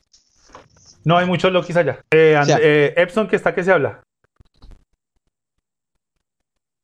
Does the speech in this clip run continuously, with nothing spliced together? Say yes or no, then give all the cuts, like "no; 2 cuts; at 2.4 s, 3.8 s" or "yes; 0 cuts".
no; 1 cut; at 2.0 s